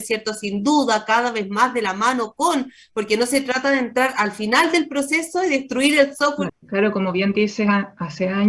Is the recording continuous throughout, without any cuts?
no; 1 cut; at 6.5 s

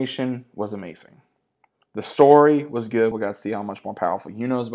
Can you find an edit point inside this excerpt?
yes; 1 cut; at 3.1 s

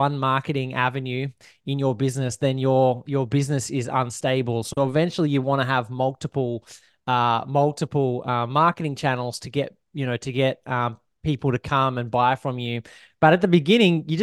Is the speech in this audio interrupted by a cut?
no; 0 cuts

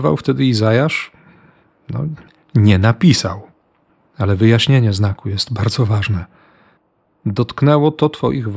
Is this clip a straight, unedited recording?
yes; 0 cuts

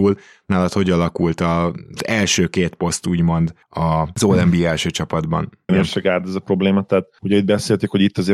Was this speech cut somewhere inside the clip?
yes; 1 cut; at 5.7 s

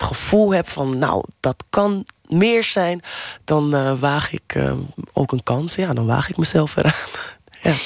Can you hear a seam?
no; 0 cuts

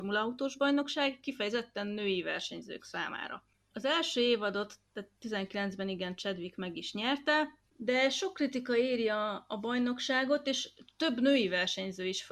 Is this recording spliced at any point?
no; 0 cuts

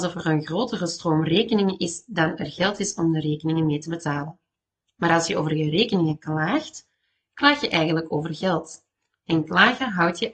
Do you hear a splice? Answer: no; 0 cuts

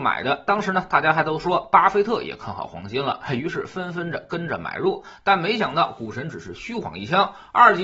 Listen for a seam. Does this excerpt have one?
no; 0 cuts

